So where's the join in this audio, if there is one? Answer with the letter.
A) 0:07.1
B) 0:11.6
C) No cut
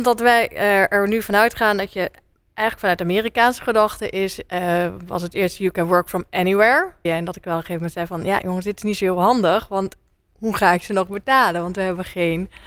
A